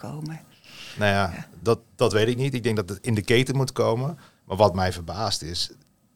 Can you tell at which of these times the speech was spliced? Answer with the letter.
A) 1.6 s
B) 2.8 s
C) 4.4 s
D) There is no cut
A